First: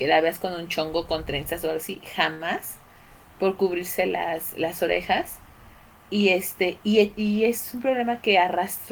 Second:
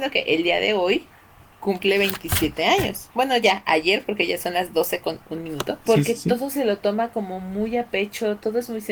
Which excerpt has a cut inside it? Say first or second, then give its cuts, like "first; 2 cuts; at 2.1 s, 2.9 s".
second; 1 cut; at 5.9 s